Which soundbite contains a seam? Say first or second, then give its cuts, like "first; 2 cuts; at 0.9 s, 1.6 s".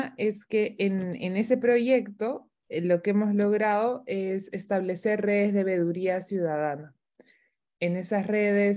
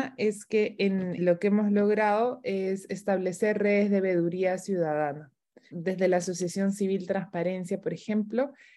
second; 2 cuts; at 1.2 s, 5.7 s